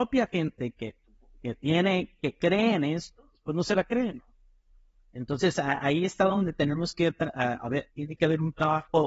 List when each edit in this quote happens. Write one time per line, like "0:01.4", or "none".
none